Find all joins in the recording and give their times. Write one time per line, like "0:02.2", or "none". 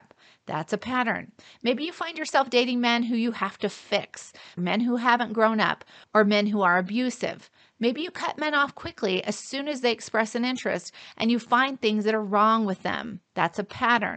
0:04.6
0:07.8